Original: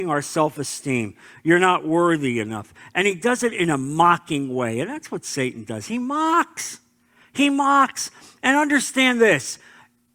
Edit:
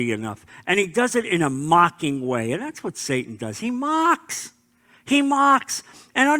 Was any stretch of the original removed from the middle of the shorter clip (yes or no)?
no